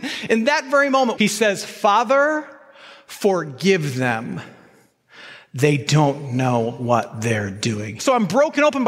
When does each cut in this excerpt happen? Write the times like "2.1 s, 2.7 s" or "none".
1.2 s, 8.0 s